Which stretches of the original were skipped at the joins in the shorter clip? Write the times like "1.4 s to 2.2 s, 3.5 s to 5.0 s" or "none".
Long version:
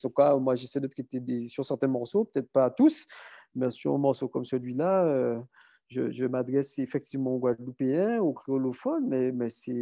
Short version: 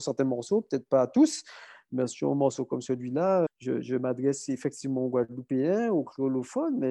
5.1 s to 5.8 s